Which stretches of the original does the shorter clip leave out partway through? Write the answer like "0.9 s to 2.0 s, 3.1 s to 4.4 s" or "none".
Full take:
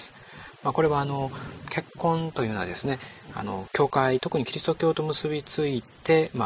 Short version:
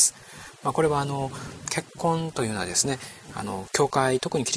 none

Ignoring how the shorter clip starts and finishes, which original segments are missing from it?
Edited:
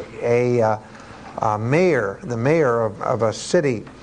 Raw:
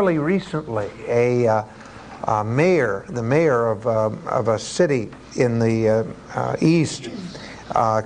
3.8 s to 4.2 s

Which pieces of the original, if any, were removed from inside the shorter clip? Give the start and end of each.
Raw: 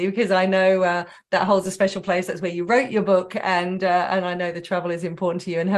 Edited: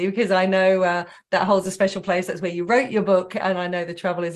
3.4 s to 4.1 s

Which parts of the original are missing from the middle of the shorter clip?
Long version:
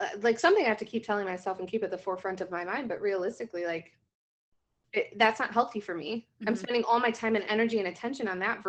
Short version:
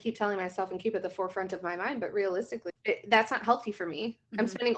3.6 s to 4.8 s

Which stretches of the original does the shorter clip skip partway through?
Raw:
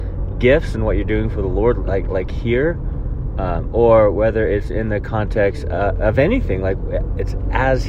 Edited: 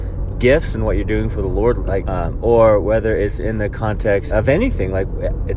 2.0 s to 3.3 s, 5.6 s to 6.0 s

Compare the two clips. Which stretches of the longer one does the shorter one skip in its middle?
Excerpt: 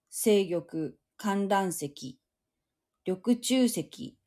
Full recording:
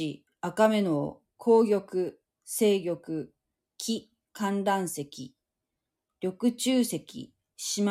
3.4 s to 4.2 s

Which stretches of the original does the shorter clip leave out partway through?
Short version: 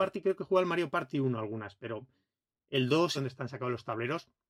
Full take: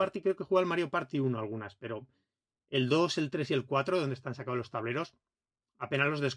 3.1 s to 4.0 s

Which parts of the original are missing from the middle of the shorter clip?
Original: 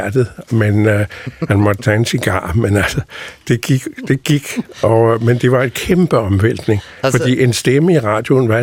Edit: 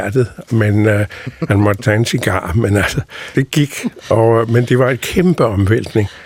3.3 s to 4.1 s

